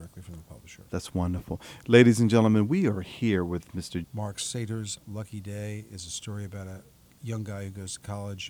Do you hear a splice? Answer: yes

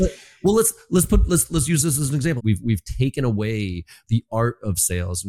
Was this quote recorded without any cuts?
no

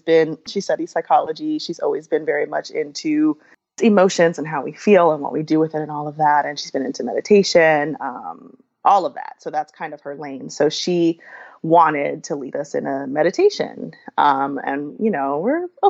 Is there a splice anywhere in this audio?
no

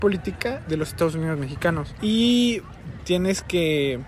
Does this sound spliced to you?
yes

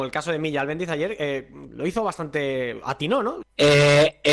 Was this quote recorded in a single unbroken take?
no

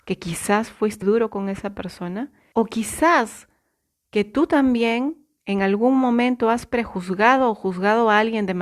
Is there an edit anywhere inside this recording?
yes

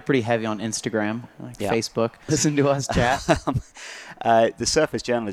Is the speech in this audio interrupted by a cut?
yes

